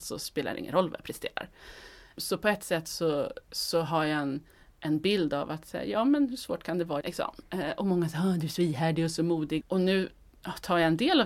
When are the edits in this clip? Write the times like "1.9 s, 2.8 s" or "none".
7.0 s, 9.6 s